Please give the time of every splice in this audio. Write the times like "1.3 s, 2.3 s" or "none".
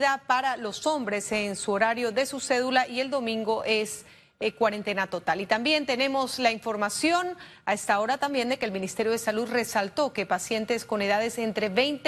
none

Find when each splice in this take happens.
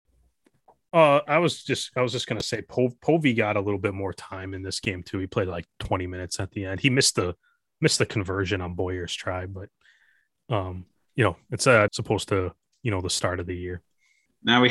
11.9 s

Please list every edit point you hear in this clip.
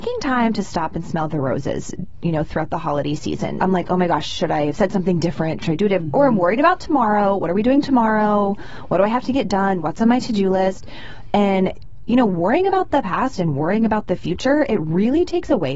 3.6 s

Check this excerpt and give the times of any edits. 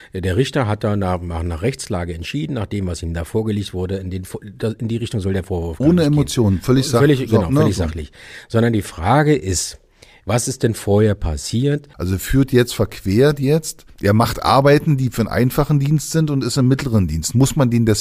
11.9 s

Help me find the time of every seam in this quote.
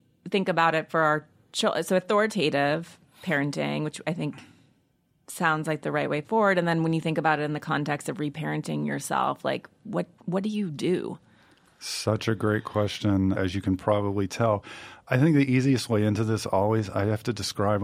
13.3 s

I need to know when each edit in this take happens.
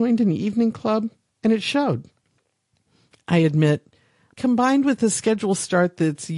1.3 s, 4.3 s

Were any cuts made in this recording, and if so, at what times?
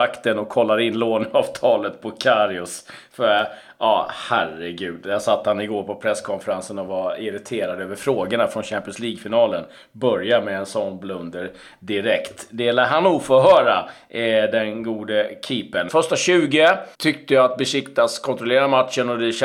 15.9 s, 16.9 s

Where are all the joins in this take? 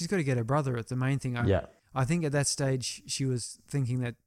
none

